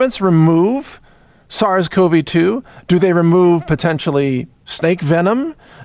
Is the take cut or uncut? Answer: uncut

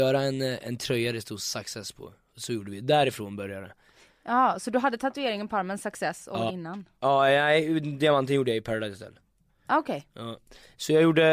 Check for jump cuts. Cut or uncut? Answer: cut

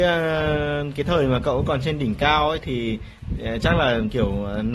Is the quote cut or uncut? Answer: cut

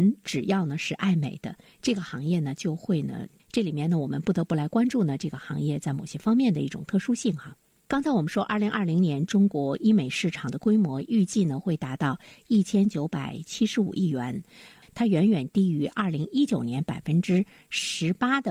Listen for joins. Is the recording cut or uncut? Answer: cut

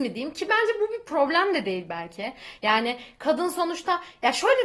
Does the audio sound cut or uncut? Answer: uncut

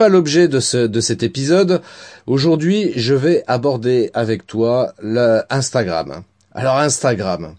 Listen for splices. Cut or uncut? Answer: uncut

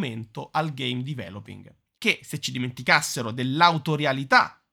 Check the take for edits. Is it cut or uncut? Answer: cut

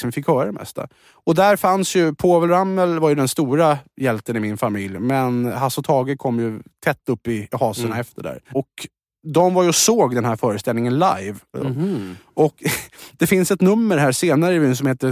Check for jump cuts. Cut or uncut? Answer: cut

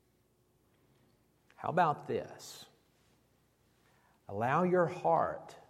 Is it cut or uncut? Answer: uncut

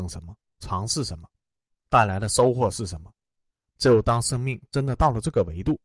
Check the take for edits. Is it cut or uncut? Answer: cut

